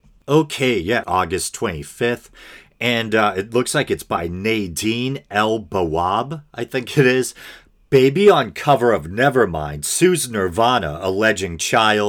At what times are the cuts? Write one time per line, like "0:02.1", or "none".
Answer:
0:01.0